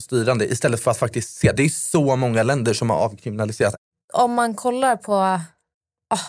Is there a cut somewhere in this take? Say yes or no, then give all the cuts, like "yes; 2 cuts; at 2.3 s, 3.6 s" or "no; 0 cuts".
no; 0 cuts